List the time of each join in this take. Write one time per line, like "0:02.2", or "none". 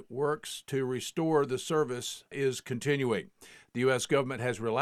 0:02.3

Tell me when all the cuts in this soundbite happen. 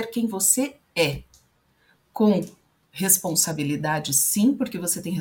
none

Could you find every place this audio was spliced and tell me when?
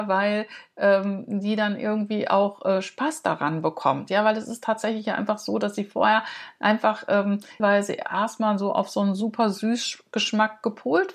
0:07.6

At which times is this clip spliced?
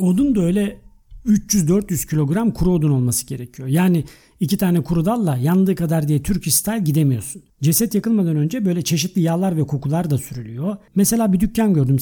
0:10.9

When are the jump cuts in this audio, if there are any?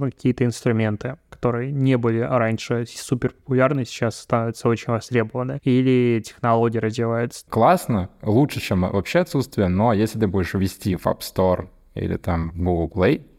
0:07.5

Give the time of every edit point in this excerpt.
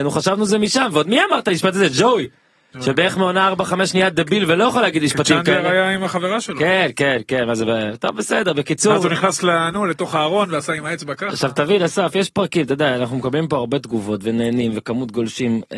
none

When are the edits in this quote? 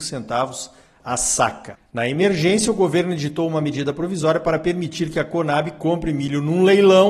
0:01.8

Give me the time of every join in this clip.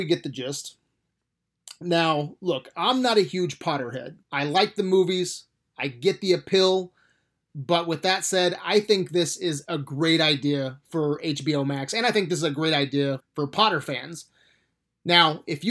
0:04.2
0:13.2

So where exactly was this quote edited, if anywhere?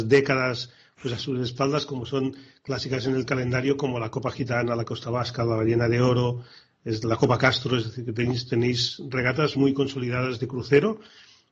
0:09.6

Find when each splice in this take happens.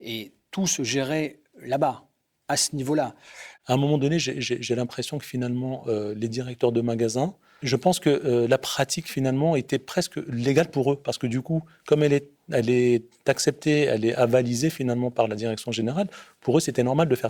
none

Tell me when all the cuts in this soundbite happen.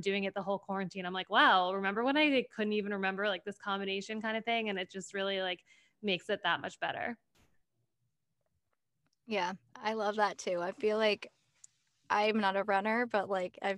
none

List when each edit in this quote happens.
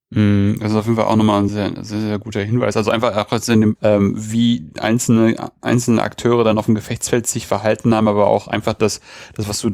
0:01.5
0:03.8

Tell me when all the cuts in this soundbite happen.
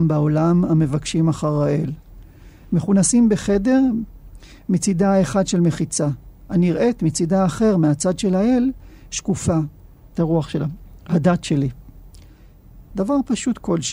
0:10.1
0:12.9

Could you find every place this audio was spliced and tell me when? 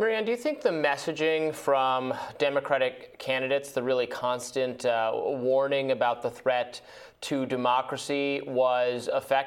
none

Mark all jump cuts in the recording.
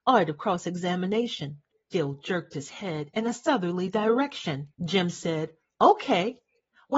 0:01.7
0:04.7

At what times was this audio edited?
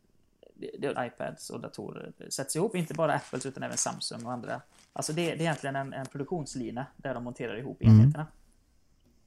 0:00.9

